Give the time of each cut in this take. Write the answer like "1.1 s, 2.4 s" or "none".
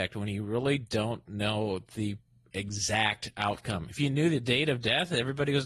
none